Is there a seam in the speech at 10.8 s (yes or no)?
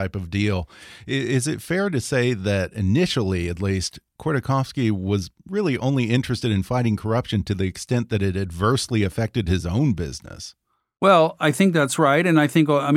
no